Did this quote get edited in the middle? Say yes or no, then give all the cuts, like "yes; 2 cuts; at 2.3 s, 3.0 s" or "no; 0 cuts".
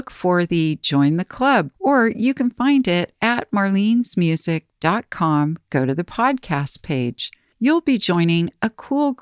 yes; 1 cut; at 1.7 s